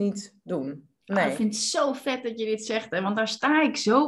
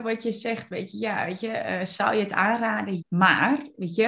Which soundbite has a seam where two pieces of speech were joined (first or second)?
second